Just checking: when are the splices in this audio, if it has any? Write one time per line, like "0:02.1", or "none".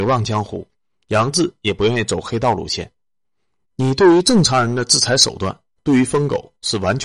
0:03.6